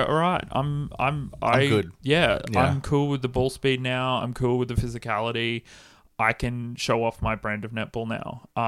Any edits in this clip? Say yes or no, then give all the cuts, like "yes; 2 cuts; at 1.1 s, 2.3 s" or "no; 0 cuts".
no; 0 cuts